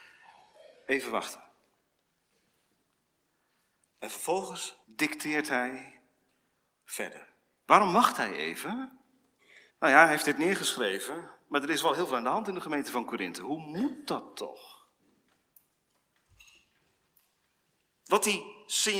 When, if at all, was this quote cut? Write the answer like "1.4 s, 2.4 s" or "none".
4.8 s, 9.7 s